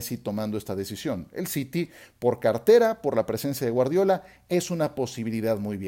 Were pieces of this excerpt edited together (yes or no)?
no